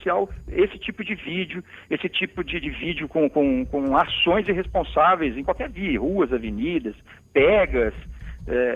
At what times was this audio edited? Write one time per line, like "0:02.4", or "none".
0:02.6